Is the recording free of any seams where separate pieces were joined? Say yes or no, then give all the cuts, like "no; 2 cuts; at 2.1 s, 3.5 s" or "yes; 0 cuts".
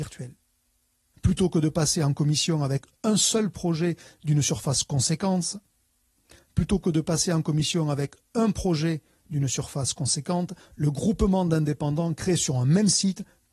no; 1 cut; at 1.1 s